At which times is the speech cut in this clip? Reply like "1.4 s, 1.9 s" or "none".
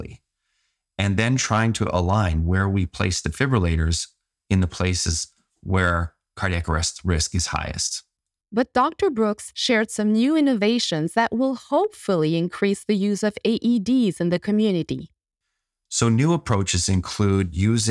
8.4 s